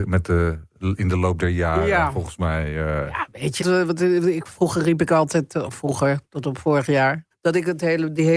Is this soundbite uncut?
no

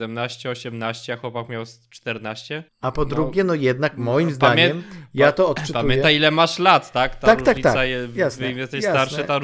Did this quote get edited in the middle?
yes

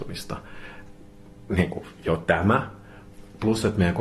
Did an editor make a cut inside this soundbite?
no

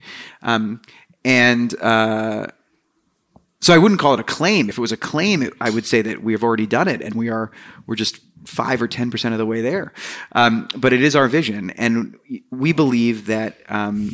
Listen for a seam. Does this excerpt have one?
no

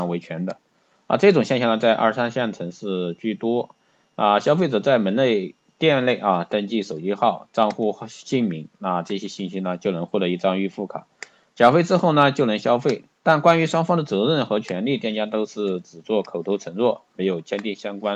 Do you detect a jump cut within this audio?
no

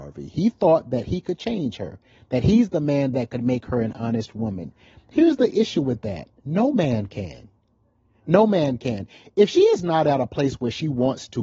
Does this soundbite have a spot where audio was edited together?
no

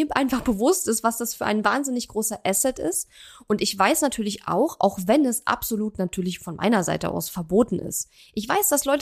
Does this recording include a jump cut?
no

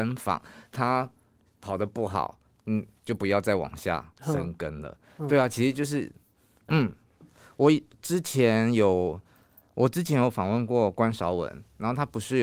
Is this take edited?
yes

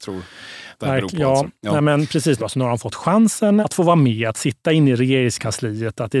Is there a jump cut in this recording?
yes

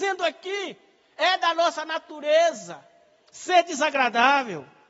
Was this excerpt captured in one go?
yes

